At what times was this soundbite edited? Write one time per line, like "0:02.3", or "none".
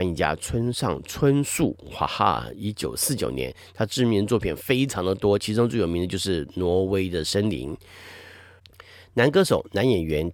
none